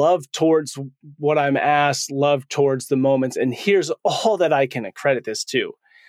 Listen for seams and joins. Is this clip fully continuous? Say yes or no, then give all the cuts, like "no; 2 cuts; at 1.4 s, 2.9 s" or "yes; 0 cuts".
yes; 0 cuts